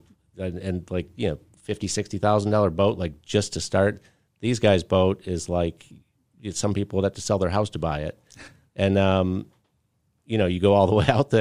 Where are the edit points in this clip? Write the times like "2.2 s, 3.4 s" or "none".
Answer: none